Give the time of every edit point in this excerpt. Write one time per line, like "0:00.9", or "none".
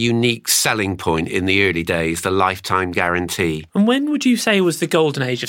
0:03.7